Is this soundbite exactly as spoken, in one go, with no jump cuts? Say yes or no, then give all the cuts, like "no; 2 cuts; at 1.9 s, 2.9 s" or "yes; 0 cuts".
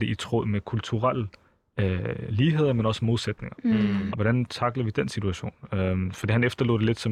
no; 1 cut; at 4.1 s